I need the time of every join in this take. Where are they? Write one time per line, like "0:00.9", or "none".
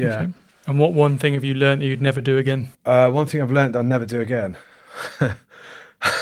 0:02.7